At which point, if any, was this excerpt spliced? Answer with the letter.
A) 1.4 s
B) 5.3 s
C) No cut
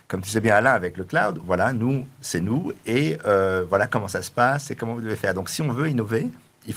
A